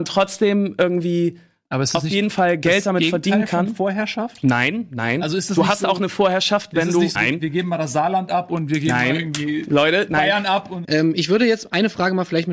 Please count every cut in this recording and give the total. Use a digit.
2